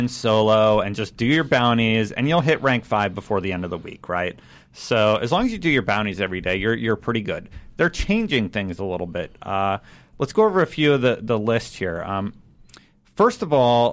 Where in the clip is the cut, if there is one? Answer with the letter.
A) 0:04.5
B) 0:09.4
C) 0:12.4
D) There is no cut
D